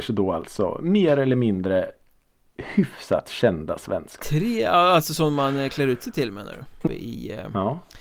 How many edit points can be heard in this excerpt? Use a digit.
2